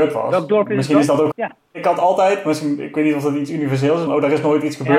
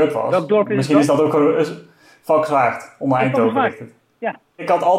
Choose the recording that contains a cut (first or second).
first